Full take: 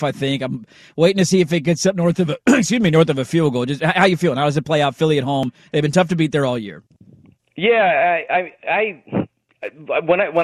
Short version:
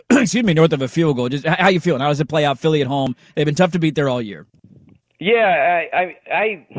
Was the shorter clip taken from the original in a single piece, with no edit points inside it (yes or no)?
yes